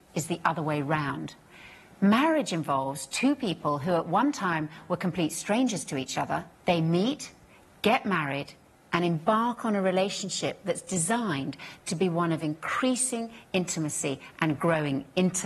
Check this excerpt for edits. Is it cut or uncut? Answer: cut